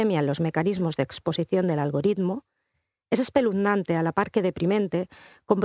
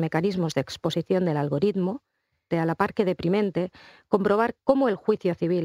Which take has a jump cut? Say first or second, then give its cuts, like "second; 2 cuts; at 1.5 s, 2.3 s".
second; 1 cut; at 2.5 s